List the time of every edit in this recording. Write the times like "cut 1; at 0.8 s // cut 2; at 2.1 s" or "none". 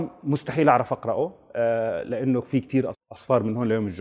cut 1; at 2.9 s